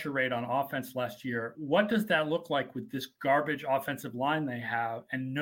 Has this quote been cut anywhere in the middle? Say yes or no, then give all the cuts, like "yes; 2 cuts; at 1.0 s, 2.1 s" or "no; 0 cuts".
no; 0 cuts